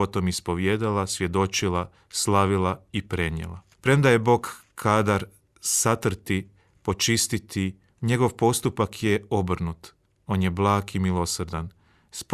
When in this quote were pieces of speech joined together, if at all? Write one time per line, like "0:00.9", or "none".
0:03.7
0:07.9